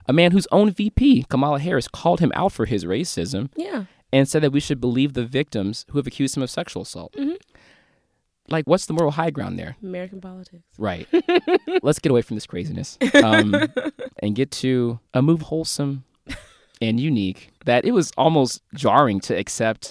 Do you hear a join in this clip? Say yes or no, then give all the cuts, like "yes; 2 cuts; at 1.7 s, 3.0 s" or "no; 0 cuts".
yes; 3 cuts; at 11.8 s, 15.4 s, 17.5 s